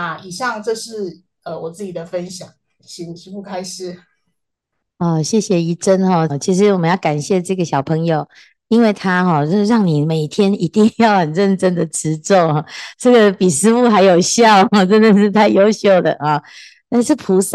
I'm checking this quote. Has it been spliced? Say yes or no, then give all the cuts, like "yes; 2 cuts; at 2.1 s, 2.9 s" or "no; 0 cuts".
yes; 2 cuts; at 2.8 s, 6.3 s